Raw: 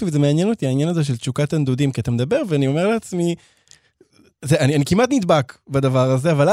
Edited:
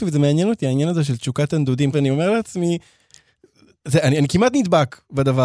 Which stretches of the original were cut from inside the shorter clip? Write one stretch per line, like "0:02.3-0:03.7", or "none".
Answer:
0:01.9-0:02.5